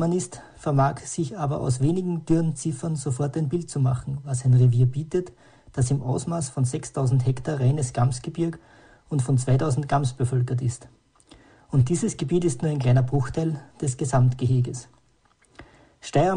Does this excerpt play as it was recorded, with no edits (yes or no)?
yes